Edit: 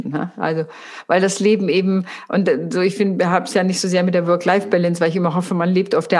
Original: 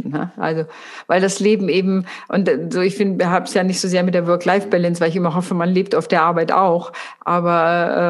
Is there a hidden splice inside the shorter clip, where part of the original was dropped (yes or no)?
no